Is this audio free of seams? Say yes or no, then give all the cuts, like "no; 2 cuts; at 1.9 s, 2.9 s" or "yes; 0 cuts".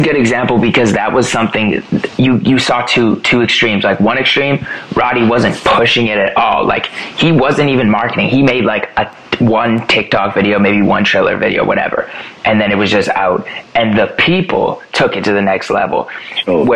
yes; 0 cuts